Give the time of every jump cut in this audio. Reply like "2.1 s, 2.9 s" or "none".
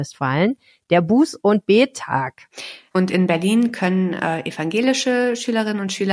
2.9 s